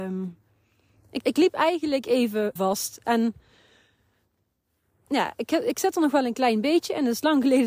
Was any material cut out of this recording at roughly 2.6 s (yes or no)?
yes